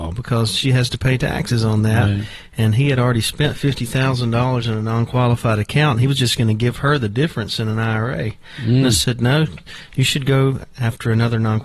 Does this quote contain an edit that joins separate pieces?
no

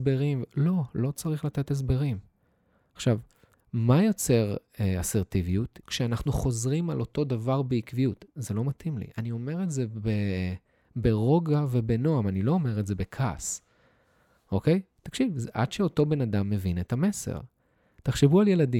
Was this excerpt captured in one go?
no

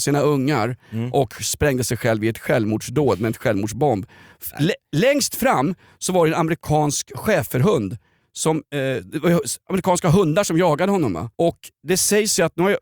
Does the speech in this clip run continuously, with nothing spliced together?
no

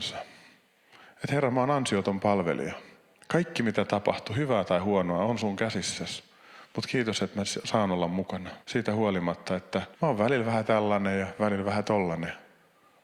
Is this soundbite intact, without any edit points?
no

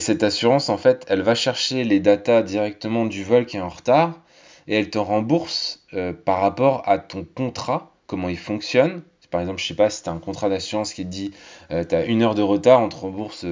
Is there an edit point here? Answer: no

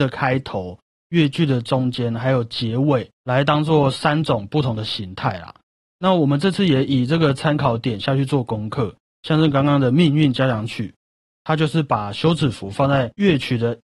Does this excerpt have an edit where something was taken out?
no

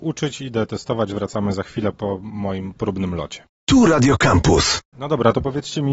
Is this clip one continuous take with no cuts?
no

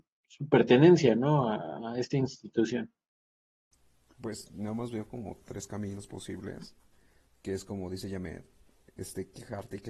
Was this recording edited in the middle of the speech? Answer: no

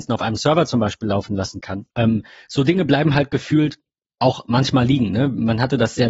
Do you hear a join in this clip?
yes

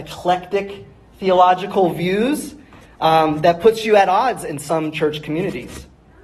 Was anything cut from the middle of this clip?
no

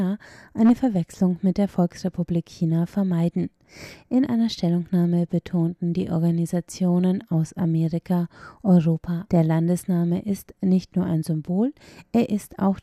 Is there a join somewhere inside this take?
yes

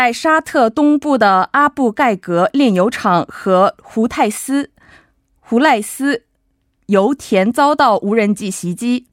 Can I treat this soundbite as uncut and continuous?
yes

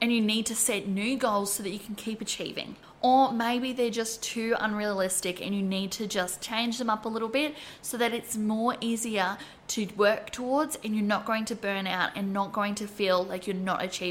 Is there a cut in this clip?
no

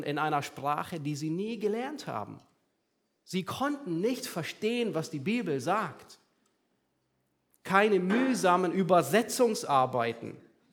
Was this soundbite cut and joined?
no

